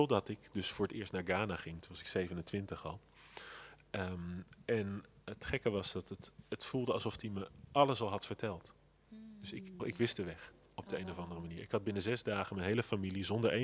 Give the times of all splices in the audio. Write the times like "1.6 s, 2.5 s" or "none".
9.8 s